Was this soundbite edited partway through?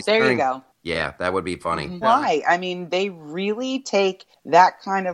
yes; 1 cut; at 2.0 s

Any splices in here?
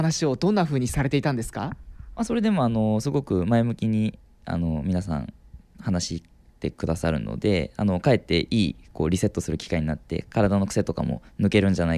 no; 0 cuts

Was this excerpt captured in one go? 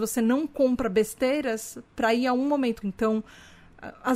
no; 1 cut; at 2.8 s

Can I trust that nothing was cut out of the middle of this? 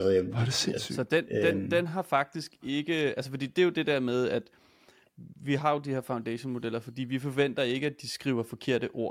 yes; 0 cuts

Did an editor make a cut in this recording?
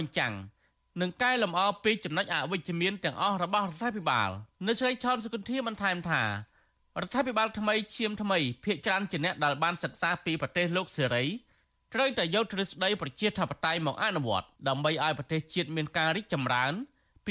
yes; 2 cuts; at 4.6 s, 14.6 s

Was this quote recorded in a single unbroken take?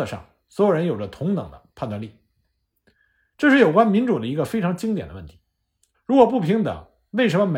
no; 1 cut; at 5.9 s

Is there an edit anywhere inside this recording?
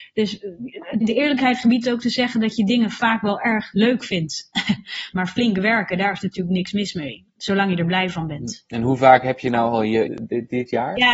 yes; 3 cuts; at 1.0 s, 5.1 s, 10.1 s

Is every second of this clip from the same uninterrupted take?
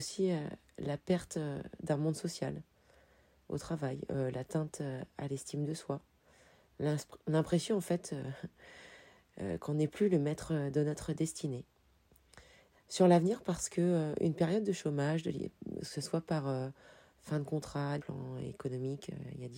no; 2 cuts; at 12.7 s, 18.0 s

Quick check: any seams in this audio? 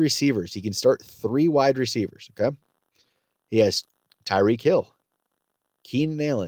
no; 0 cuts

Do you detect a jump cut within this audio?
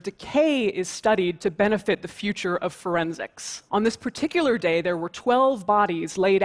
yes; 1 cut; at 3.7 s

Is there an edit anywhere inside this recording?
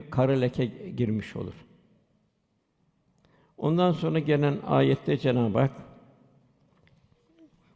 no; 0 cuts

